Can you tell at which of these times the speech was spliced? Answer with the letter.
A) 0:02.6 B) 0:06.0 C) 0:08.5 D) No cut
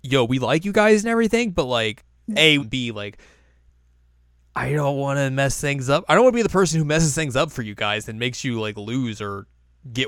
A